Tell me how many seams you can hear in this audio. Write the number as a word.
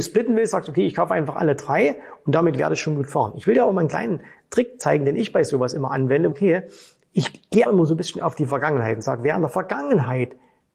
two